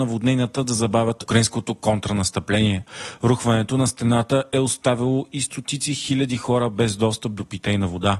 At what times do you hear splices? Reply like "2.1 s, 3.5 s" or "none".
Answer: none